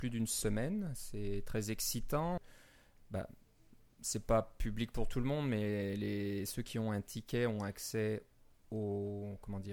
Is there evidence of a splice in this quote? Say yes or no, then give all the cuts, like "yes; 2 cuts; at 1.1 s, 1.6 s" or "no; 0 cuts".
yes; 1 cut; at 2.4 s